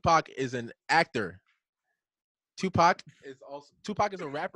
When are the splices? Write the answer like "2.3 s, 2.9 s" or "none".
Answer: none